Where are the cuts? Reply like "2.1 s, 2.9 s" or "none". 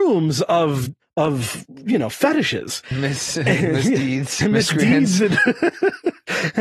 1.0 s, 4.4 s